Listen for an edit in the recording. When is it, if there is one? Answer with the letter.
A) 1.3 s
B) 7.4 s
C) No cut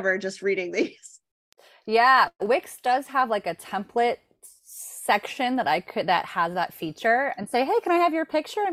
B